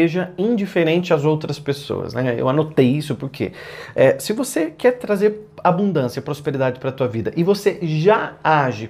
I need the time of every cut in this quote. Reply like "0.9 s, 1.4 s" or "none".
none